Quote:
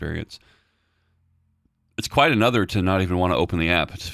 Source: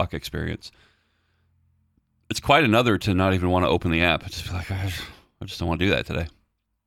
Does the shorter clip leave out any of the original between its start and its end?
no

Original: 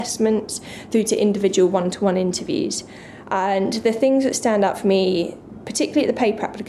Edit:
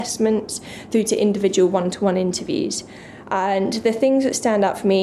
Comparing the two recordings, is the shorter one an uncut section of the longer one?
yes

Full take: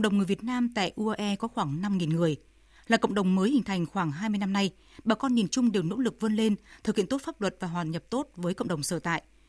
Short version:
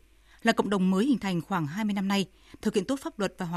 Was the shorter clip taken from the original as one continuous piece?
no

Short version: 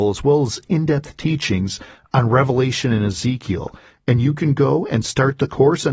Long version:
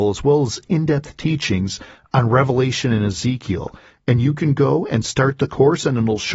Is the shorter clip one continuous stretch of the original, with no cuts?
yes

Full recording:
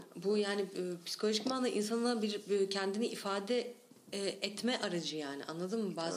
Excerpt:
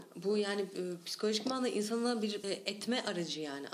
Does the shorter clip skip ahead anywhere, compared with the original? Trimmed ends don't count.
yes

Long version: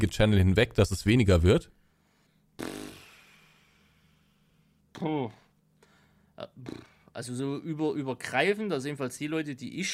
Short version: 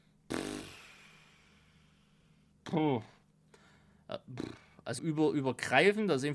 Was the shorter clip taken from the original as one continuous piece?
no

